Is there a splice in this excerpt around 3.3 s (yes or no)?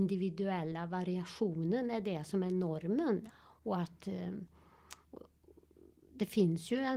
yes